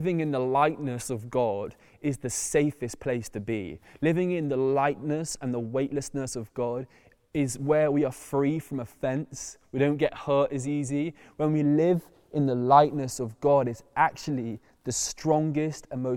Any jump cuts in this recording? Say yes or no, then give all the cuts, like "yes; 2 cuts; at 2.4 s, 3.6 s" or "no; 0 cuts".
no; 0 cuts